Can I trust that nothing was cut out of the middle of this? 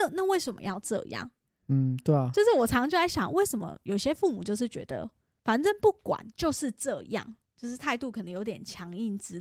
yes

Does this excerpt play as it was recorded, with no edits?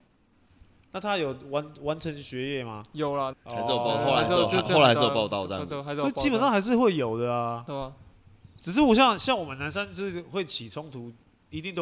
no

